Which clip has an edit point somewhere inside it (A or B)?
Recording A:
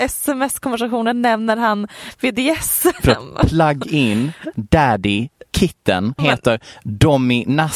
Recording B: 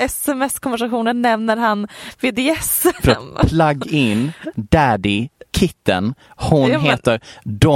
A